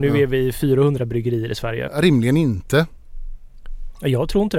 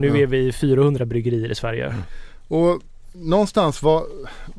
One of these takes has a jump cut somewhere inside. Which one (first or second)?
first